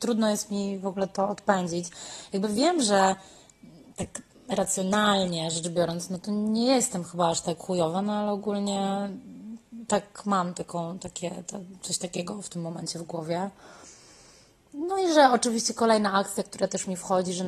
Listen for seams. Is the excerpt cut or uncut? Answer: uncut